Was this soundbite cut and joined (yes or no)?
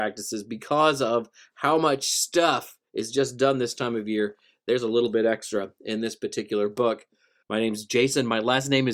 yes